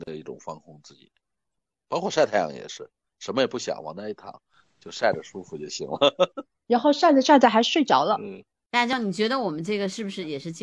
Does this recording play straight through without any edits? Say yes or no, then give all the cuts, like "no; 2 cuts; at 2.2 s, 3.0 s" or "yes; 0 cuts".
yes; 0 cuts